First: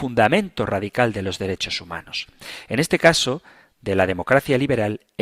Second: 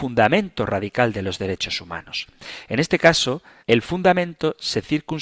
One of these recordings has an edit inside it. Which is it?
second; 1 cut; at 3.6 s

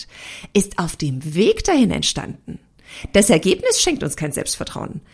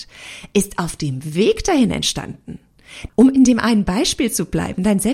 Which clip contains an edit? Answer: second; 1 cut; at 3.1 s

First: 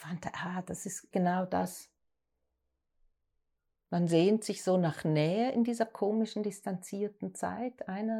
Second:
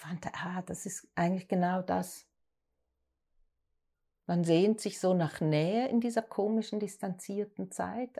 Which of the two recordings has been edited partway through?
first; 1 cut; at 1.1 s

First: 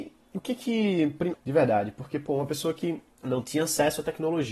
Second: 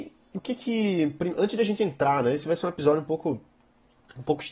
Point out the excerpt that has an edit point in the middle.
first; 2 cuts; at 1.3 s, 3.1 s

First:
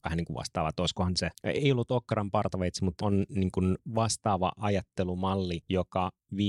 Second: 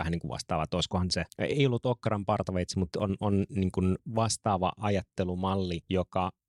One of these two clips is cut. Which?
first; 1 cut; at 3.0 s

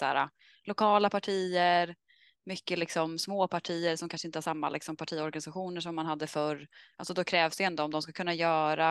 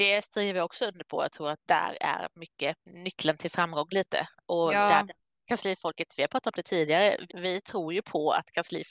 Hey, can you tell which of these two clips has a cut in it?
second; 1 cut; at 7.3 s

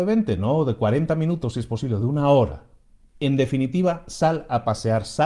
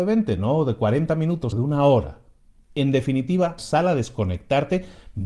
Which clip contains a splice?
second; 2 cuts; at 1.5 s, 3.6 s

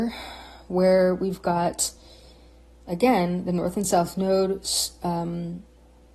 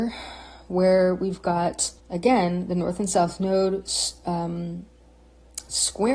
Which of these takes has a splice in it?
second; 1 cut; at 2.0 s

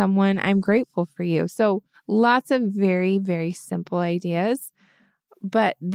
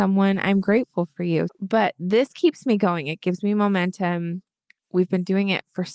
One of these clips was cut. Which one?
second; 1 cut; at 1.5 s

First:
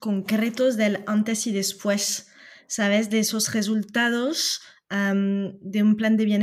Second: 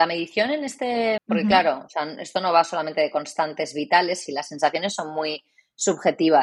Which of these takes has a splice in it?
second; 2 cuts; at 1.2 s, 4.3 s

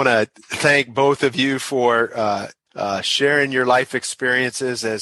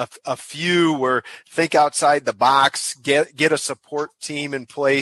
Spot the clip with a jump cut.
first; 1 cut; at 2.7 s

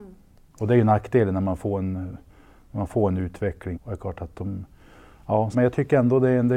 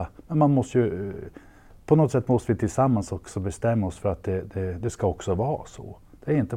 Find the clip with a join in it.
first; 2 cuts; at 3.7 s, 5.5 s

